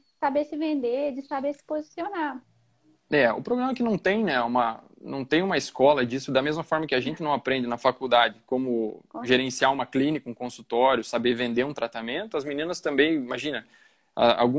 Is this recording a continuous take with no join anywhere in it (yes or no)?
yes